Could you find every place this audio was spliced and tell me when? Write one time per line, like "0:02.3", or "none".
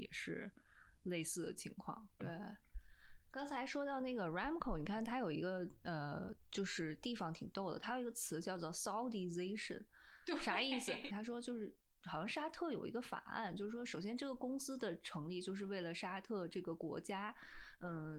0:02.2
0:11.1